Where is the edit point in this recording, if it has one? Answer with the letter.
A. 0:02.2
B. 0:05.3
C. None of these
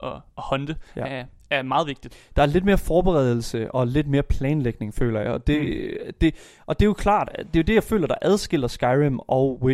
C